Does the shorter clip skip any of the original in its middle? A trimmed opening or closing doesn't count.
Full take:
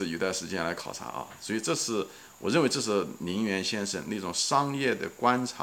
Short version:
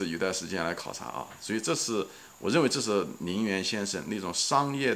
no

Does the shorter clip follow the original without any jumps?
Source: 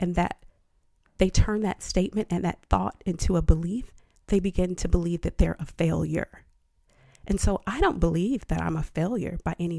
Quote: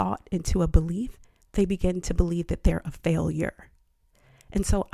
yes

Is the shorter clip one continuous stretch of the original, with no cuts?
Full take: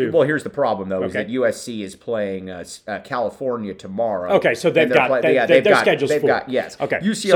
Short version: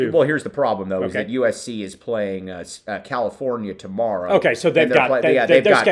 yes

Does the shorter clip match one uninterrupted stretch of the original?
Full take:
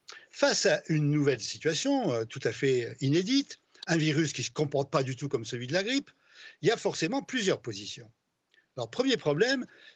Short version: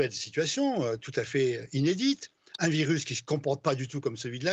yes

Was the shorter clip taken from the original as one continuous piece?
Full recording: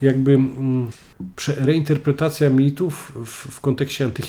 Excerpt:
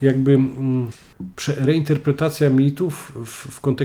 yes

